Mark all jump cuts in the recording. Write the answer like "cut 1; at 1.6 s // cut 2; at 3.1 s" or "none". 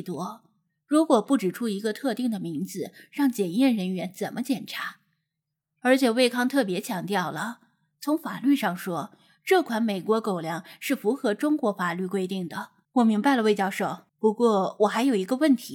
cut 1; at 12.8 s // cut 2; at 14.1 s